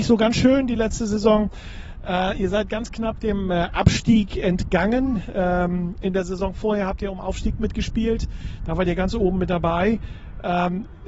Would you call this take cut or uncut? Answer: uncut